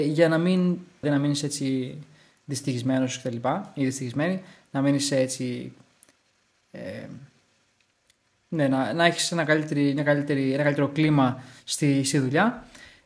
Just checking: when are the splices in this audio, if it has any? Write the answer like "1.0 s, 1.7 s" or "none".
1.0 s